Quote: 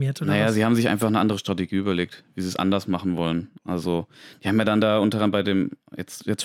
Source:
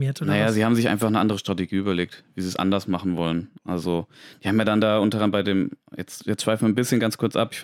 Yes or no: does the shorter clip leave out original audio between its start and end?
no